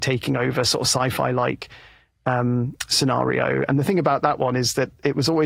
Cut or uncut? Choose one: uncut